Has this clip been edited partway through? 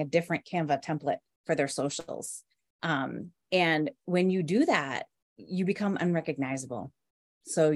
no; 0 cuts

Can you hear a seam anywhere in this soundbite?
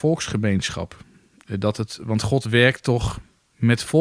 yes; 1 cut; at 2.0 s

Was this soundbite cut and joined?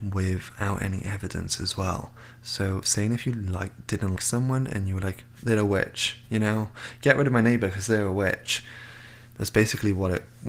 yes; 1 cut; at 4.2 s

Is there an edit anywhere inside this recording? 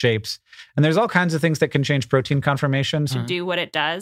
yes; 1 cut; at 3.1 s

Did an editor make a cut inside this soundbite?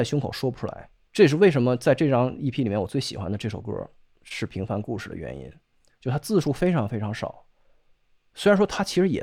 no; 0 cuts

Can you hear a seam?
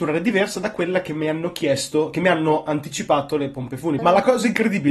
yes; 1 cut; at 4.0 s

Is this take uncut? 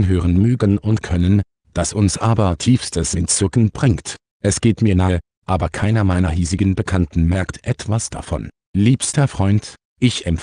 no; 2 cuts; at 4.3 s, 8.6 s

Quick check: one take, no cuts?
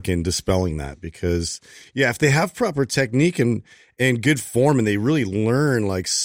yes; 0 cuts

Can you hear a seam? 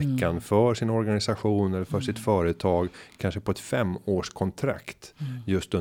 no; 0 cuts

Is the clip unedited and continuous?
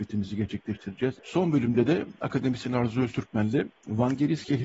no; 1 cut; at 1.2 s

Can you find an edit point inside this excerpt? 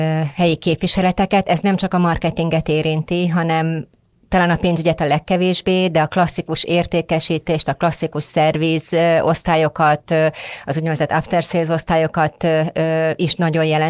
no; 0 cuts

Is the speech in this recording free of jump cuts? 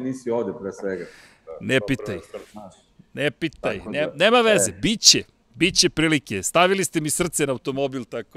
yes; 0 cuts

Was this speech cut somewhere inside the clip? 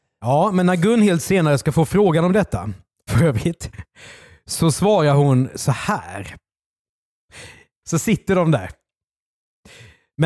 yes; 2 cuts; at 3.1 s, 7.8 s

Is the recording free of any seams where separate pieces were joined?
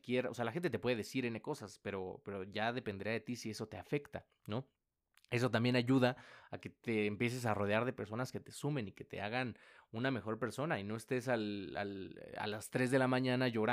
yes; 0 cuts

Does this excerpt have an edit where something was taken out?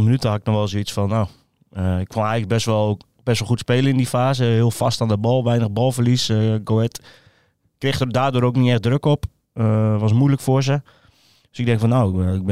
no; 0 cuts

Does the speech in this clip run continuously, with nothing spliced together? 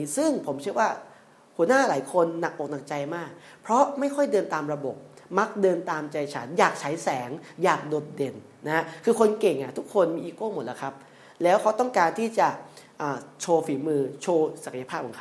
yes; 0 cuts

